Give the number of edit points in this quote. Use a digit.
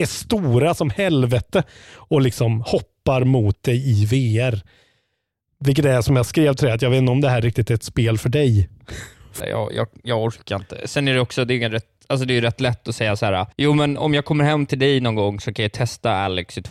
2